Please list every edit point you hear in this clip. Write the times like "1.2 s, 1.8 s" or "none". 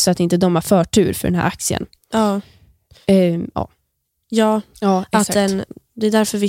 4.7 s